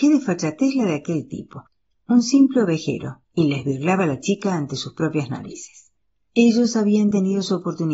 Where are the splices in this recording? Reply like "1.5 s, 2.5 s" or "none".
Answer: 6.3 s